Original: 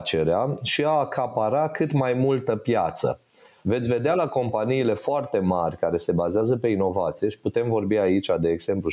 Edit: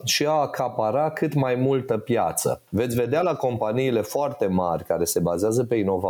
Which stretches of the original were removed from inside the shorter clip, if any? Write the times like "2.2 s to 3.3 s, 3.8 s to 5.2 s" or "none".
3.3 s to 3.6 s